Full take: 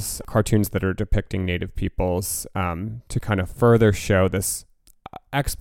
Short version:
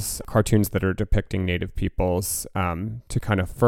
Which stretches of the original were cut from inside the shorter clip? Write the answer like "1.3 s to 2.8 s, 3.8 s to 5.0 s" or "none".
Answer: none